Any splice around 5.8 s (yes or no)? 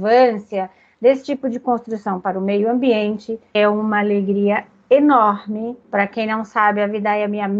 yes